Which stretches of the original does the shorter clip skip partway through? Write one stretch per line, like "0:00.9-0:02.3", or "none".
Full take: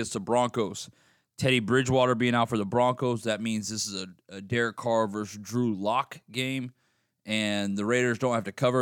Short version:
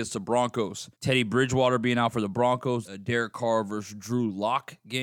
0:00.9-0:01.3
0:03.2-0:04.3